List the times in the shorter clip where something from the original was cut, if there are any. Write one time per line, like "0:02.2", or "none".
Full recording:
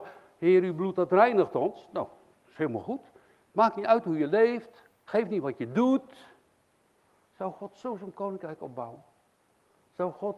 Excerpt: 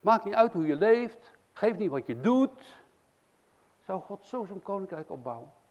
none